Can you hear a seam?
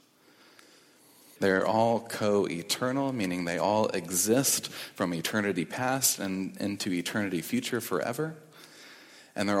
yes; 1 cut; at 1.4 s

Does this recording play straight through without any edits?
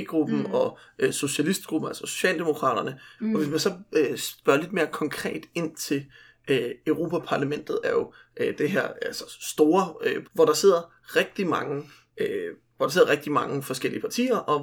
no; 3 cuts; at 3.2 s, 7.8 s, 10.2 s

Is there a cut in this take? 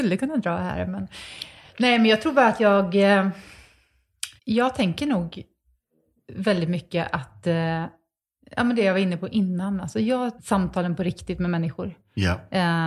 yes; 2 cuts; at 4.4 s, 10.4 s

